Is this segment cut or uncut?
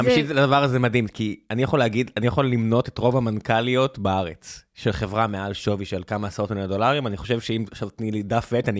uncut